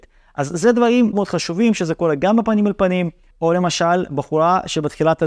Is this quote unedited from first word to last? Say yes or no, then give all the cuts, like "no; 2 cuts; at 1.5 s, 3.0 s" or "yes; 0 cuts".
no; 2 cuts; at 1.1 s, 3.3 s